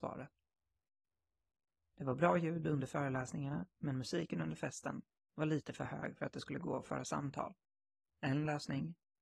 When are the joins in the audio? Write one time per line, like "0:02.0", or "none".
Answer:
none